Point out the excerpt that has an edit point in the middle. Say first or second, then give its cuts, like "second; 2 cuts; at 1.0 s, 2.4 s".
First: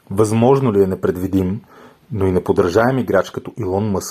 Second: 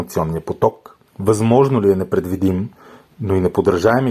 second; 1 cut; at 1.1 s